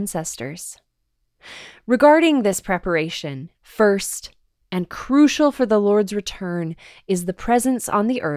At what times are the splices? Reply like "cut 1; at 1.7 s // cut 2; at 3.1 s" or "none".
cut 1; at 3.5 s